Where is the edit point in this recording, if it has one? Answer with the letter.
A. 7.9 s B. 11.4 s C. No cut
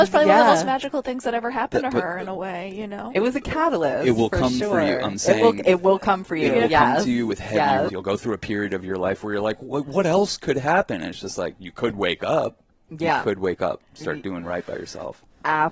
A